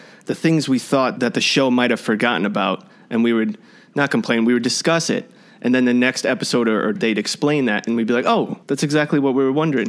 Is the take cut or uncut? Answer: cut